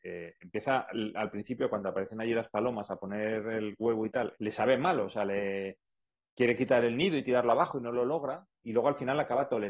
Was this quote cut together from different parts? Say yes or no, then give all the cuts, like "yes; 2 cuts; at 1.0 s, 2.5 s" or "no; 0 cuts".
yes; 1 cut; at 4.3 s